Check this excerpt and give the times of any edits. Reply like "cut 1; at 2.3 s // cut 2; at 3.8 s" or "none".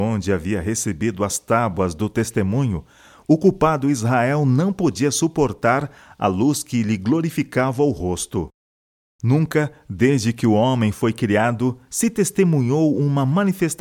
cut 1; at 9.1 s